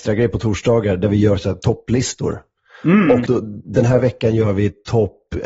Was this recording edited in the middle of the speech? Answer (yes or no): yes